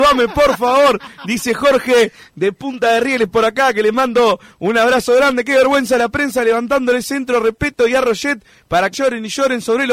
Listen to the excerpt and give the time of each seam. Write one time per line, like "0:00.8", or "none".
0:08.9